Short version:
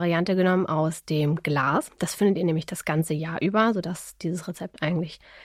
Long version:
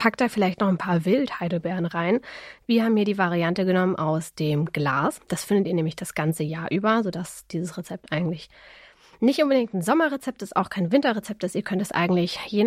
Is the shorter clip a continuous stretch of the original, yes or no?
yes